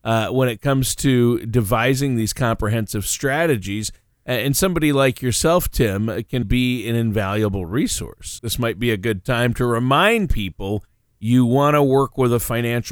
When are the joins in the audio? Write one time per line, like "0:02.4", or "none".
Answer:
0:06.4
0:08.4